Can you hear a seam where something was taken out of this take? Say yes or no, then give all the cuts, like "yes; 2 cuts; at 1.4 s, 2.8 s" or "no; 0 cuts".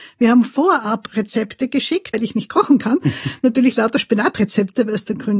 yes; 1 cut; at 2.1 s